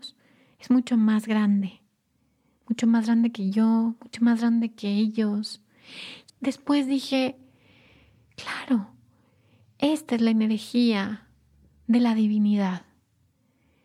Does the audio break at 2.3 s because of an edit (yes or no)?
no